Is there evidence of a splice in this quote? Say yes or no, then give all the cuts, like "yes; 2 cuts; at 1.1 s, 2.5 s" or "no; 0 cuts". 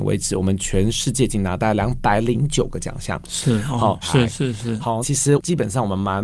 yes; 2 cuts; at 4.0 s, 5.0 s